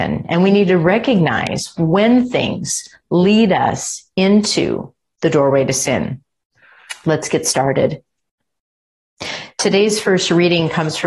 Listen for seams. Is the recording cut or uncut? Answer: uncut